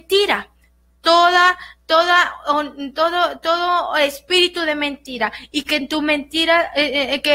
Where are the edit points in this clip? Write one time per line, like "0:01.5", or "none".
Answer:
none